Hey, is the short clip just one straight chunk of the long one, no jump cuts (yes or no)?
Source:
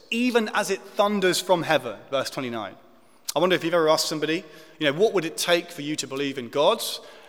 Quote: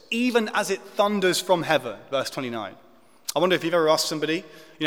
yes